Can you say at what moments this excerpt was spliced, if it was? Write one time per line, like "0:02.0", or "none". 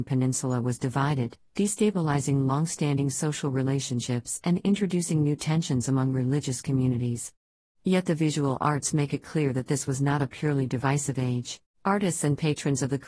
0:11.7